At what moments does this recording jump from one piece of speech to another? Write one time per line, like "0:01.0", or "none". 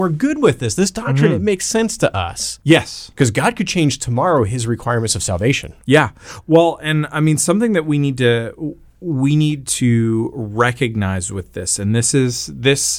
0:02.6